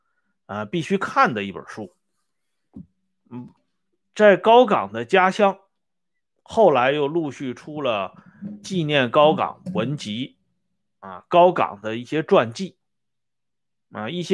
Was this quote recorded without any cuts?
yes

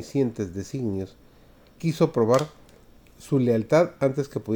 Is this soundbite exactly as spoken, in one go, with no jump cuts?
yes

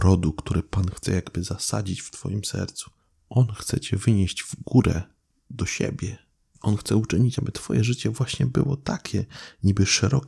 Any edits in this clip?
no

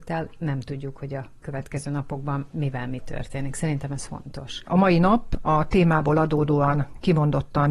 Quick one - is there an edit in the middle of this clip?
yes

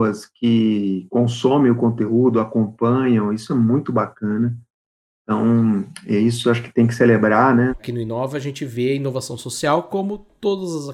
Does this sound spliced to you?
yes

